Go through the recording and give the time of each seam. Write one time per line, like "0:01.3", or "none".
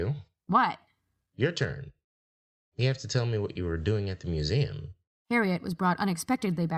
0:05.1

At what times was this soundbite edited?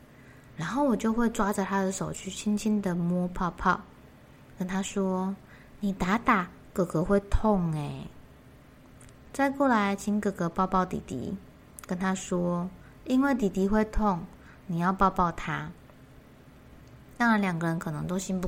none

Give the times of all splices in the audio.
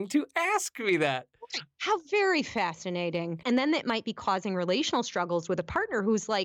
0:03.4

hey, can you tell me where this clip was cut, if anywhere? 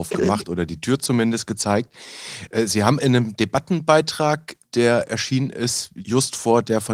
none

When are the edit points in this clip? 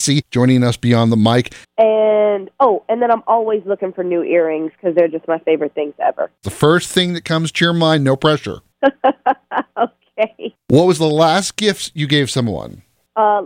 0:01.6
0:06.4

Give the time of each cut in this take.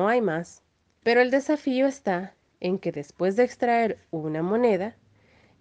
0:01.0

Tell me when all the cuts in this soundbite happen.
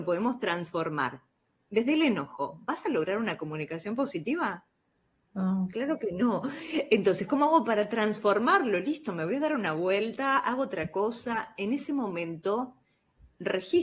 0:05.3

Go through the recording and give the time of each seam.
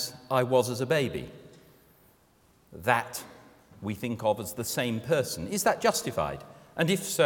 none

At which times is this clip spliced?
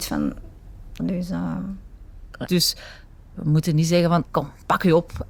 0:01.0
0:02.5
0:04.3

